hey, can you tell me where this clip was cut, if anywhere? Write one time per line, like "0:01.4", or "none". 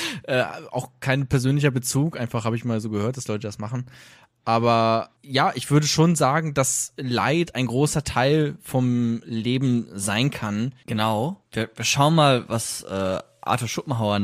0:10.8